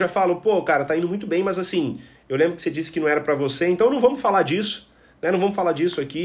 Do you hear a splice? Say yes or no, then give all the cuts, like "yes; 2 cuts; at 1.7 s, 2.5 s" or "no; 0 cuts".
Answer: no; 0 cuts